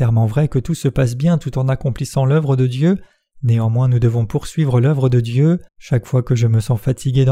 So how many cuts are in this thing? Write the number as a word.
two